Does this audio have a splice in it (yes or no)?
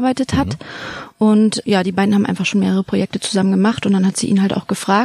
no